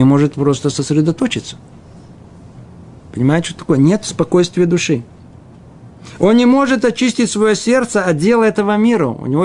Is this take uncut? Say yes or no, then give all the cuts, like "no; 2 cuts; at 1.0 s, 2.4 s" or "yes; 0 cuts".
yes; 0 cuts